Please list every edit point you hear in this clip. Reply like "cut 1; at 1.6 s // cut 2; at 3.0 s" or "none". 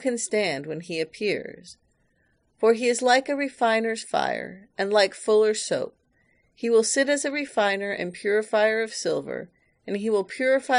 none